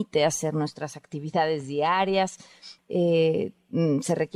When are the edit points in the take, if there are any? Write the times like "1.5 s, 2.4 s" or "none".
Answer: 2.8 s